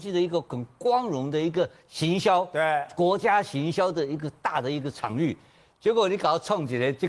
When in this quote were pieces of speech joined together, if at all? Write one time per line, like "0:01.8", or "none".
none